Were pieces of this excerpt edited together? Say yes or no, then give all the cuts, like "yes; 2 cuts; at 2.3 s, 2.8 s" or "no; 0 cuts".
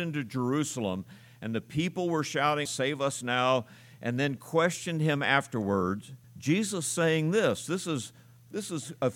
yes; 2 cuts; at 2.7 s, 6.2 s